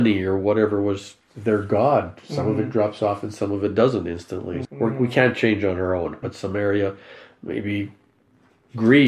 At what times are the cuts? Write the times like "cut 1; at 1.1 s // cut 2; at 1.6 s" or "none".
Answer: cut 1; at 4.6 s // cut 2; at 6.2 s